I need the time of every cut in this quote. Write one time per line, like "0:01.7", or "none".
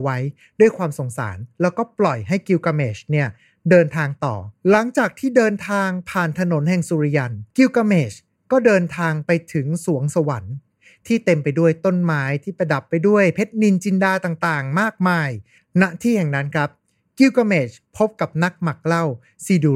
0:04.6
0:07.5